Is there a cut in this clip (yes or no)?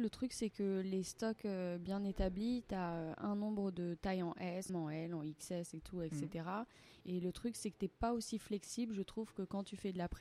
yes